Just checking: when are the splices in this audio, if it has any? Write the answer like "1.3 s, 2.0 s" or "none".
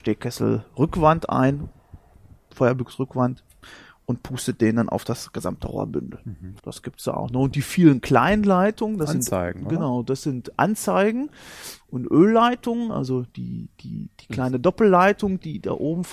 6.6 s